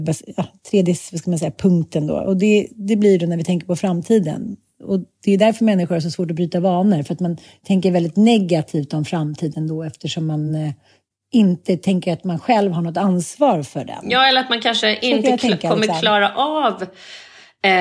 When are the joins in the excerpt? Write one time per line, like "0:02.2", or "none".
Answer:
none